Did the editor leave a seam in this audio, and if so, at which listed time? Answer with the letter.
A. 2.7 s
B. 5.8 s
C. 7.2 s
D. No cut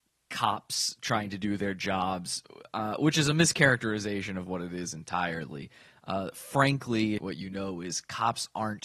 C